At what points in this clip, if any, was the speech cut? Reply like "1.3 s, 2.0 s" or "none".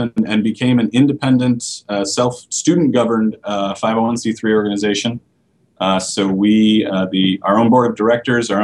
7.4 s